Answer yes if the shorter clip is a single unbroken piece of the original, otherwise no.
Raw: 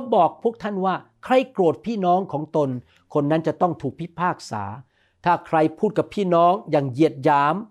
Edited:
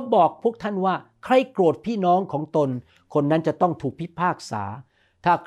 yes